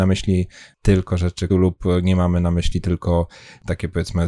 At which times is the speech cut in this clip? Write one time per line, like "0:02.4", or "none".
0:01.5